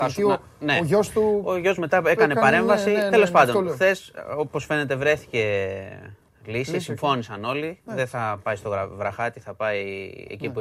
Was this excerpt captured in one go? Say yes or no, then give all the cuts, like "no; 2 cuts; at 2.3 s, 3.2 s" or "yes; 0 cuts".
yes; 0 cuts